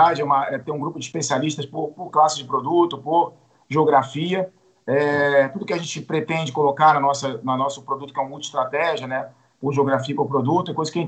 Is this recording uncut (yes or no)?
yes